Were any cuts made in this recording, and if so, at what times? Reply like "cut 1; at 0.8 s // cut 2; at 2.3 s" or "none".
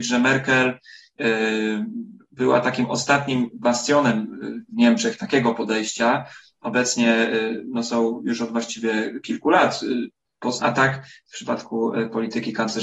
cut 1; at 10.6 s